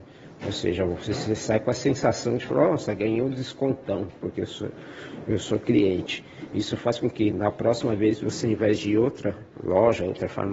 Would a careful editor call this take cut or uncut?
cut